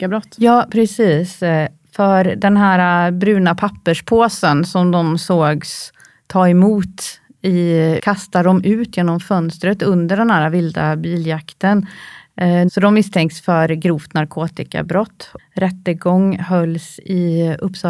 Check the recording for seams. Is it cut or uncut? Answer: cut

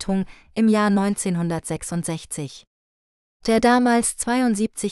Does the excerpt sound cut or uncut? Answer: uncut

